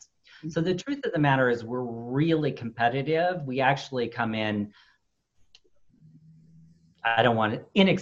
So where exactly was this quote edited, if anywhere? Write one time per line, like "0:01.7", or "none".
none